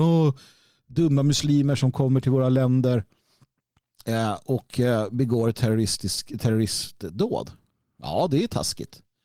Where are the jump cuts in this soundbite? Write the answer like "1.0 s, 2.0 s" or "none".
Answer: none